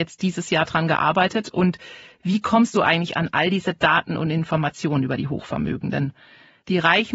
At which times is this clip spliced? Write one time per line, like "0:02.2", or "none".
none

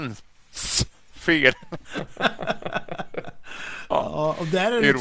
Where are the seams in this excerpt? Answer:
none

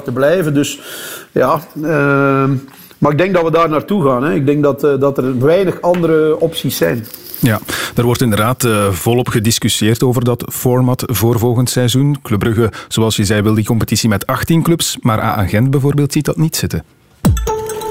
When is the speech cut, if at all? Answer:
none

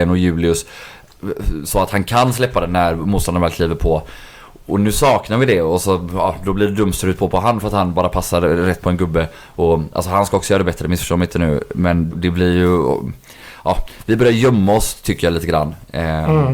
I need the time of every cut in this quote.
0:12.1

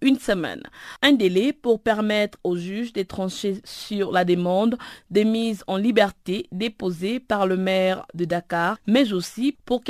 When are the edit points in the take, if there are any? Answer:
none

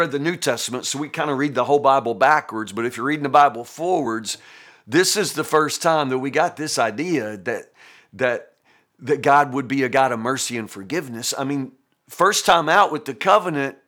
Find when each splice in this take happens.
none

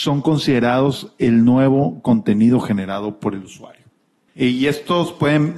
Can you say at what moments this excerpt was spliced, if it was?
0:04.3

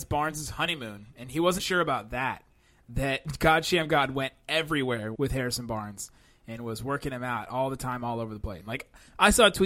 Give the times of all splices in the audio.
0:01.6
0:05.2
0:08.6

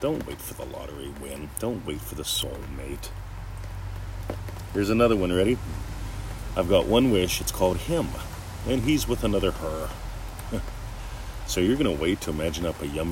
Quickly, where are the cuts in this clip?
none

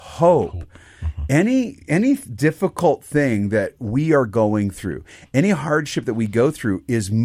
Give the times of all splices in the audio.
none

